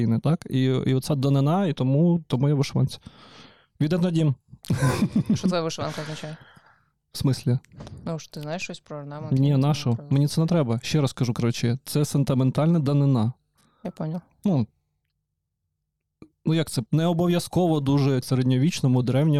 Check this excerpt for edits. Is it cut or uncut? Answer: cut